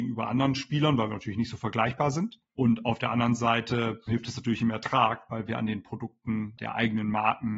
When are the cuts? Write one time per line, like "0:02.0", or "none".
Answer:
none

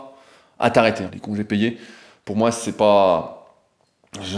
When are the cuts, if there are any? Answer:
0:01.1

